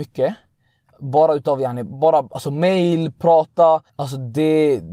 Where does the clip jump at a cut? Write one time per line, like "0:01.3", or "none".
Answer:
0:03.9